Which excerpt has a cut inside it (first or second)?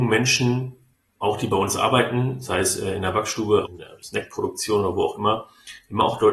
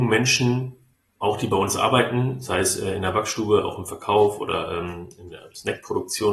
first